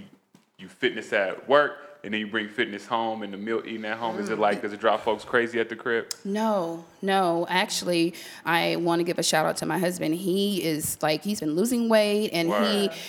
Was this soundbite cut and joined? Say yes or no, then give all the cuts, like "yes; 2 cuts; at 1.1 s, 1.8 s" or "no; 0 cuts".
yes; 1 cut; at 8.4 s